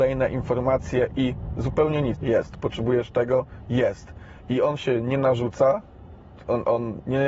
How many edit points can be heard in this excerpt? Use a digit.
1